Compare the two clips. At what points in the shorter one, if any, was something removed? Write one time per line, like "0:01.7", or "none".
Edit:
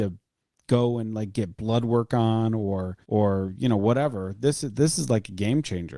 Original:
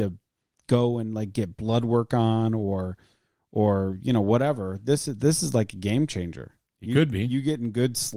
0:03.0